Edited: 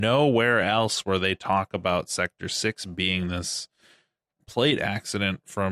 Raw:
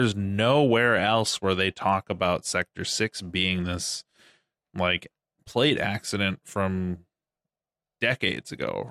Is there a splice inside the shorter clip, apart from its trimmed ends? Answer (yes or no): yes